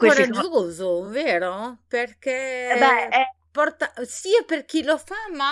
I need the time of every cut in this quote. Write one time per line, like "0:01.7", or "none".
none